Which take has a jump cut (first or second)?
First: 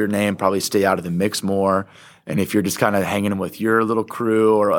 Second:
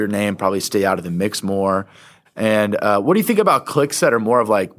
second